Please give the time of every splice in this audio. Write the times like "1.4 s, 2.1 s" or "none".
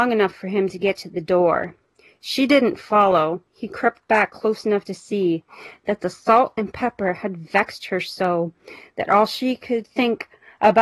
none